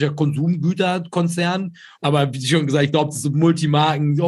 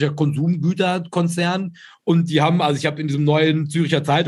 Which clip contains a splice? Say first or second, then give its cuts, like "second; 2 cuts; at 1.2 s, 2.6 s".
first; 1 cut; at 1.9 s